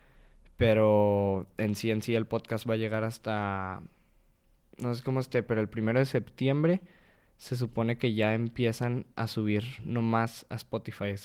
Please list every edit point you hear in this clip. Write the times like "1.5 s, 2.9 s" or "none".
none